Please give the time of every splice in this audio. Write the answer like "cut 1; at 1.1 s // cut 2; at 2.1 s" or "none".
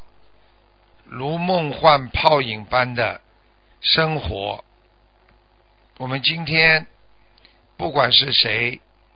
cut 1; at 0.9 s

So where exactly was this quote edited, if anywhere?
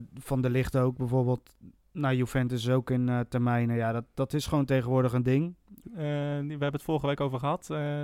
cut 1; at 5.8 s

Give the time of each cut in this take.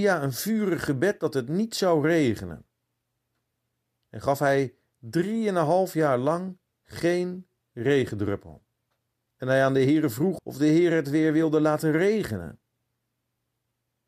cut 1; at 4.0 s // cut 2; at 9.3 s // cut 3; at 10.4 s

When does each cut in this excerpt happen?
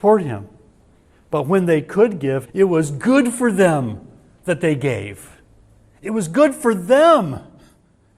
cut 1; at 2.5 s

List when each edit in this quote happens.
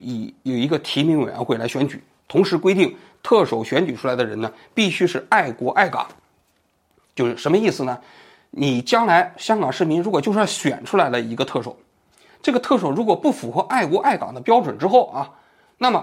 none

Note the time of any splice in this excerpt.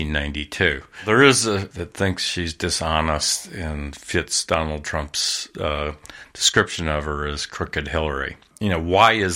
cut 1; at 1.7 s

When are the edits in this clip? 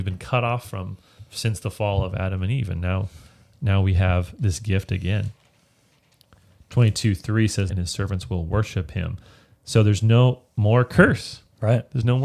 cut 1; at 7.7 s

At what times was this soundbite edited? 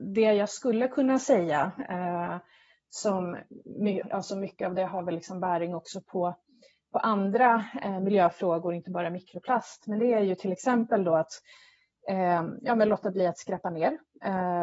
cut 1; at 4.0 s

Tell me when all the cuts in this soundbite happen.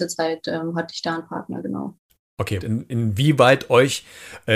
cut 1; at 2.6 s

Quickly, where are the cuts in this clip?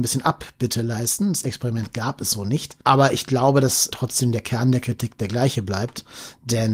cut 1; at 2.8 s // cut 2; at 3.9 s

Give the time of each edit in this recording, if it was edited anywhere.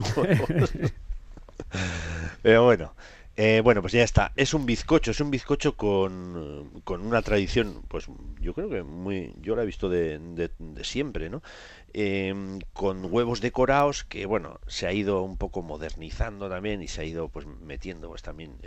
none

